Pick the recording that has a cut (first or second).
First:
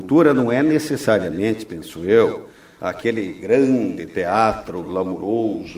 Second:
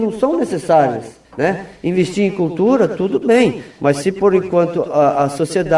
second